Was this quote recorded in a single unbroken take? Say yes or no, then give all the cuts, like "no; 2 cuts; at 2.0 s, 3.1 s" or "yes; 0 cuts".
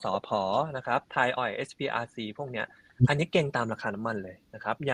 no; 1 cut; at 1.4 s